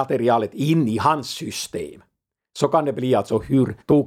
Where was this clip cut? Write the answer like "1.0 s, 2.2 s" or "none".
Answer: none

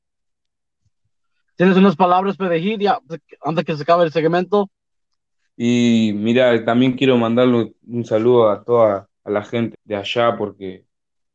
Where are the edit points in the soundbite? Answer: 3.1 s, 9.7 s

